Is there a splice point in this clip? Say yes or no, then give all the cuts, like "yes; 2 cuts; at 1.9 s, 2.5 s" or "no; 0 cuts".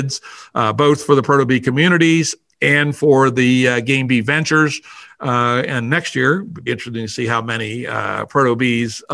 yes; 2 cuts; at 5.1 s, 6.7 s